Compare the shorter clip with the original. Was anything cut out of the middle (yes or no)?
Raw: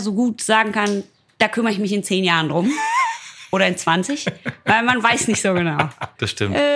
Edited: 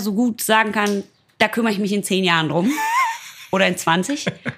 no